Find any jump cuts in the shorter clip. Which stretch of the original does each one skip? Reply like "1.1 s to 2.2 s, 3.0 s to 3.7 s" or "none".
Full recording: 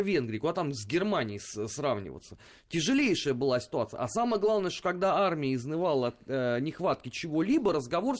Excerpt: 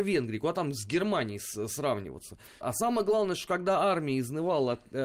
2.6 s to 4.0 s